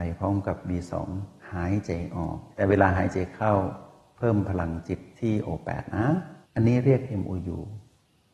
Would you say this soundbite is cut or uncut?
cut